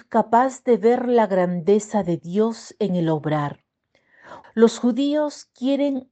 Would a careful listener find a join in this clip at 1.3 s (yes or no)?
no